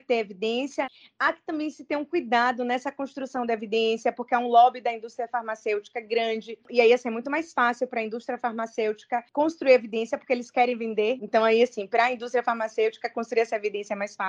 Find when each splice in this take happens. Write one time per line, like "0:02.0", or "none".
0:11.2